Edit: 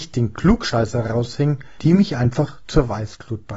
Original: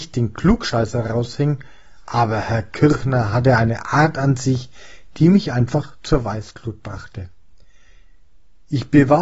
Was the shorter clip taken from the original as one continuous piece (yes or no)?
no